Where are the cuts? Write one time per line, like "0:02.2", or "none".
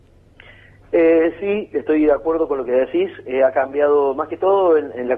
none